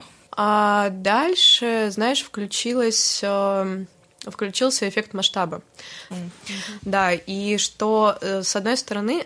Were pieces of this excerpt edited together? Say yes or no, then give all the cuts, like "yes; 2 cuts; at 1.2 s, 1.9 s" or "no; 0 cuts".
yes; 1 cut; at 6.1 s